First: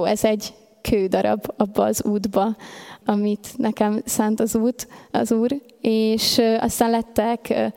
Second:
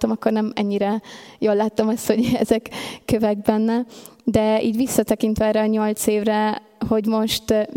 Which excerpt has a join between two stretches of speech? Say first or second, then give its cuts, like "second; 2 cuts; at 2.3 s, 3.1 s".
first; 1 cut; at 3.0 s